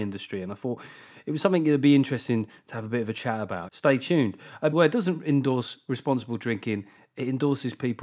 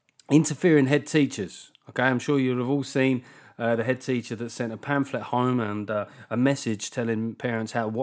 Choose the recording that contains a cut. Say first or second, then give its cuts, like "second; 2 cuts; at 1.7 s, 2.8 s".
first; 2 cuts; at 3.7 s, 4.7 s